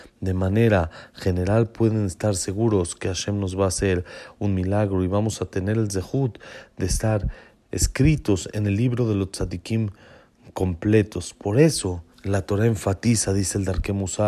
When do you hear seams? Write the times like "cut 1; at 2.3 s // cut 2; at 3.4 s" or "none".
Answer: cut 1; at 12.1 s